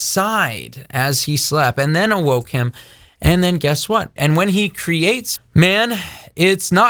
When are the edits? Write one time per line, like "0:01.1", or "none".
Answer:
0:04.2
0:05.4